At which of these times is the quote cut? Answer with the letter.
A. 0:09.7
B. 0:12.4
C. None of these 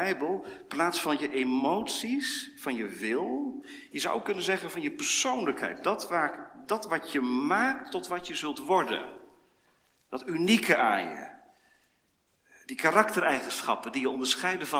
C